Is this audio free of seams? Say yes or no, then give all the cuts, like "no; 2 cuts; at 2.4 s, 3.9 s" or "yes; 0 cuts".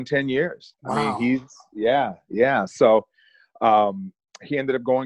yes; 0 cuts